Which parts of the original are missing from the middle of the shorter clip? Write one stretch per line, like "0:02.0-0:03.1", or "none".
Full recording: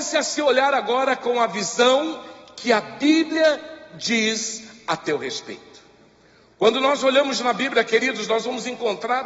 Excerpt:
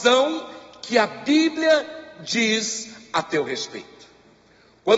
none